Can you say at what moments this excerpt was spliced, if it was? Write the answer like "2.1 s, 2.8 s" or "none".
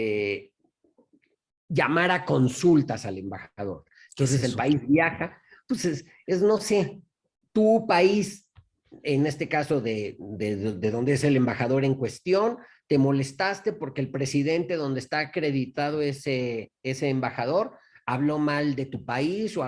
none